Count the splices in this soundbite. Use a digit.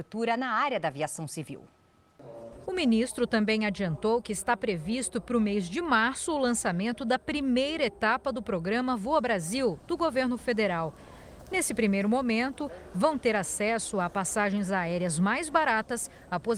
1